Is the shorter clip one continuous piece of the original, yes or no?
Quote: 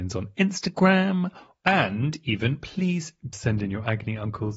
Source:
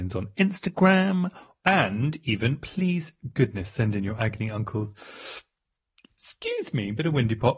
no